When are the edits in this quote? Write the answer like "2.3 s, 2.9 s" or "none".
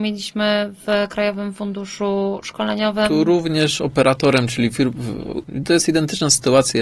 5.4 s